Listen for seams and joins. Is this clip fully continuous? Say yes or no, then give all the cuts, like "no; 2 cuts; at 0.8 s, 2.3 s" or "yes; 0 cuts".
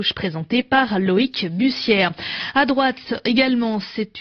yes; 0 cuts